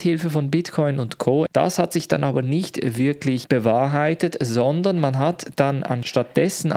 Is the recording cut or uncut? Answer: cut